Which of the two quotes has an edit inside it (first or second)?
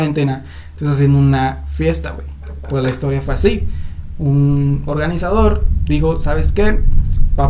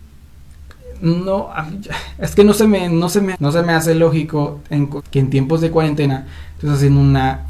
second